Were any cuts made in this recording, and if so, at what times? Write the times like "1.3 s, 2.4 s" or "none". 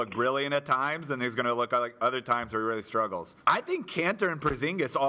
3.4 s